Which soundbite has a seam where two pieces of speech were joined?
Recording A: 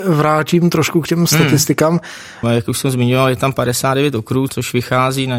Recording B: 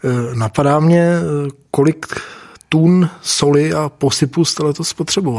A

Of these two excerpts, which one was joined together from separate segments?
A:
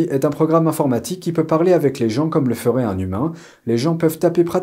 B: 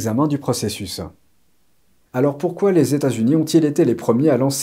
B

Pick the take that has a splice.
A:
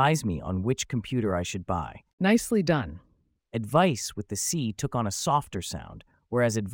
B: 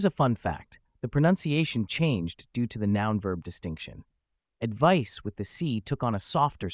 A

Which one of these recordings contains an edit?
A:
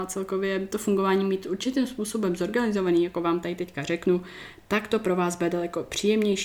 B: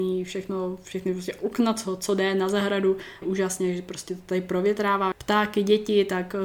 B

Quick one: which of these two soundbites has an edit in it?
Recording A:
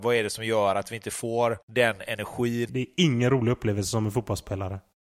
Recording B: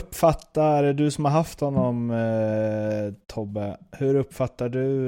A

